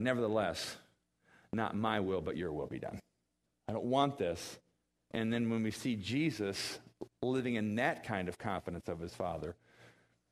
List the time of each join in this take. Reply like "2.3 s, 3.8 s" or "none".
3.5 s, 5.1 s